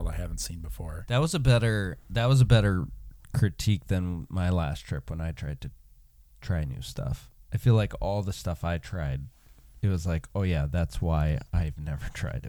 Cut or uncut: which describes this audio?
uncut